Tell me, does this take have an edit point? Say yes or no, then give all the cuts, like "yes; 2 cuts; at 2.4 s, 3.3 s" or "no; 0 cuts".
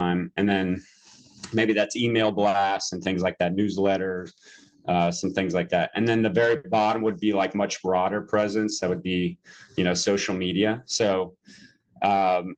no; 0 cuts